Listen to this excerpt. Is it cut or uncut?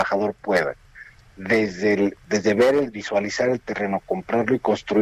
cut